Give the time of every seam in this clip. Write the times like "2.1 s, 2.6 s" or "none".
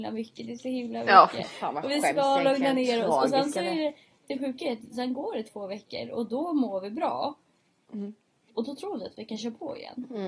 none

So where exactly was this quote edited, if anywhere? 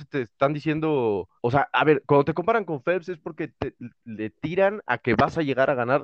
1.4 s

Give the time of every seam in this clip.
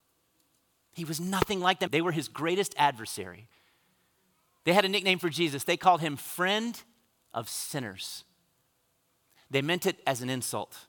1.9 s

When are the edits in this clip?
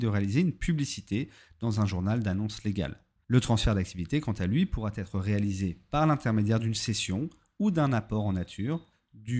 none

